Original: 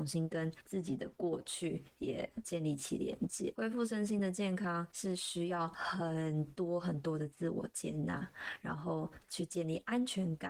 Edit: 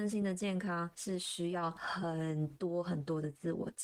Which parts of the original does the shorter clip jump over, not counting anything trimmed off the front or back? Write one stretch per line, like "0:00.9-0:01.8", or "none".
none